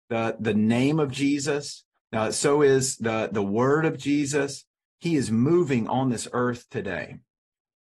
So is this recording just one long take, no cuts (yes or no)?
no